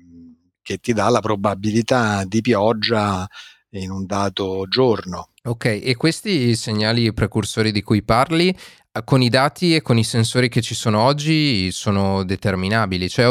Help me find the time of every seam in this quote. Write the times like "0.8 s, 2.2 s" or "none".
5.4 s